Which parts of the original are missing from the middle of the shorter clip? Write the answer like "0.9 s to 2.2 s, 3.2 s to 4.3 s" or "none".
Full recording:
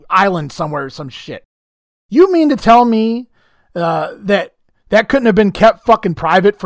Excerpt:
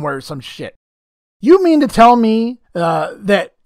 3.3 s to 3.7 s